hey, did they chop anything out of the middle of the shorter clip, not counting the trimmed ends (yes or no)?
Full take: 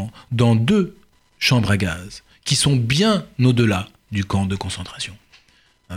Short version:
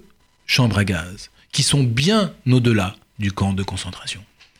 no